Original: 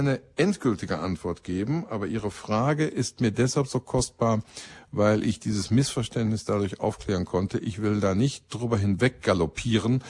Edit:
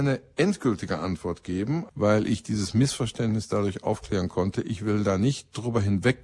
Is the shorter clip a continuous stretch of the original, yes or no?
no